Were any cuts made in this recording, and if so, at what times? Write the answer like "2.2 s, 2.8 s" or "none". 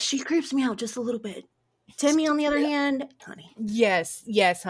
3.2 s